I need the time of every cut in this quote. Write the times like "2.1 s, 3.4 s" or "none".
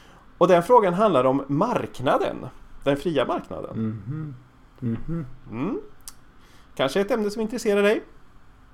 none